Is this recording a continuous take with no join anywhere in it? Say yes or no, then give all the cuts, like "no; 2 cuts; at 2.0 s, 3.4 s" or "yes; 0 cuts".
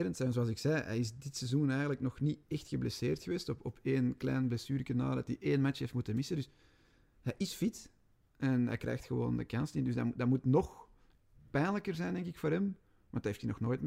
yes; 0 cuts